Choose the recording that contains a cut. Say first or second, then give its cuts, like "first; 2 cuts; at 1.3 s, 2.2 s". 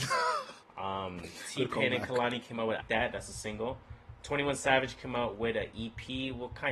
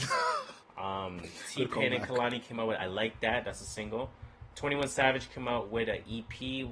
first; 1 cut; at 2.8 s